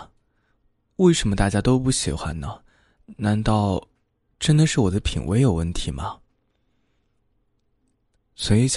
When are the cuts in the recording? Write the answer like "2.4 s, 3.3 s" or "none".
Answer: none